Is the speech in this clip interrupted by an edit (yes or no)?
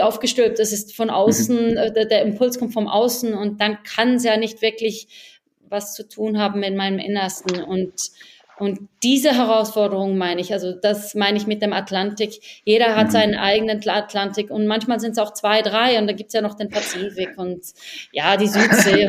no